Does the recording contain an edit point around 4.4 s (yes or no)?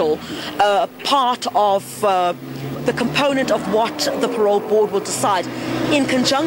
no